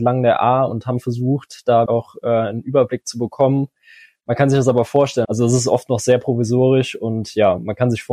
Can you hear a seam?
yes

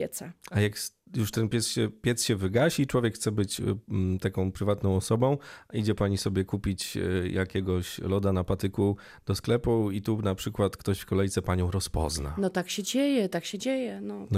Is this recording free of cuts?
yes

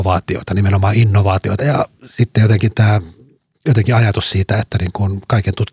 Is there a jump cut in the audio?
yes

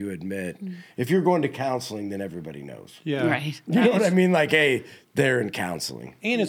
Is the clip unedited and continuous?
yes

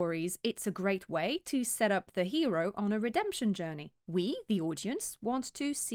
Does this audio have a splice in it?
no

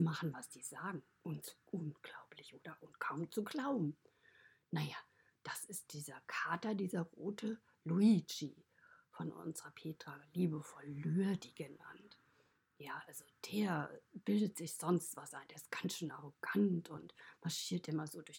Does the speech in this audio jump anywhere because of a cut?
no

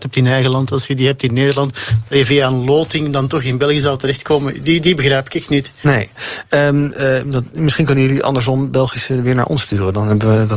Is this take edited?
no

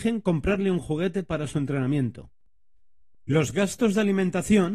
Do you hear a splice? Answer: yes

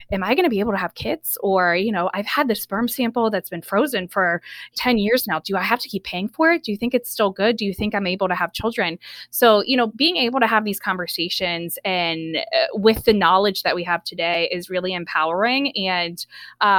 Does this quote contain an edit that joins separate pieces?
no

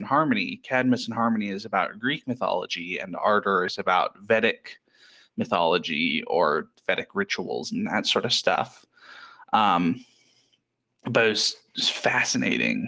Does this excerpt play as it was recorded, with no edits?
yes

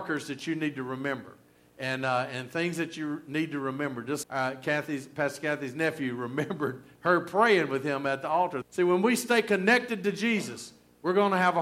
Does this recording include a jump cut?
yes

